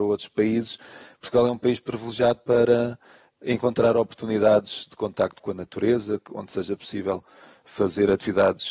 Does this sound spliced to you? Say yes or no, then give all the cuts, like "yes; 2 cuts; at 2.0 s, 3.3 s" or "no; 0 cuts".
no; 0 cuts